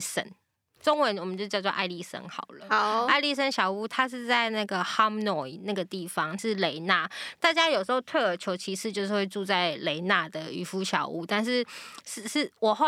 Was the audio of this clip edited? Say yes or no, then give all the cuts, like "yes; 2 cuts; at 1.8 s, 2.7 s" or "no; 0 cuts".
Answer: yes; 1 cut; at 6.4 s